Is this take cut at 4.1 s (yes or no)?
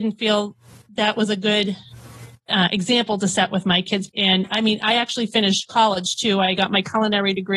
yes